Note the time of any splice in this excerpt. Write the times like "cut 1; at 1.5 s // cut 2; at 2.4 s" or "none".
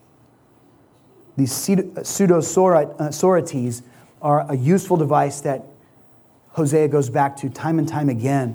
none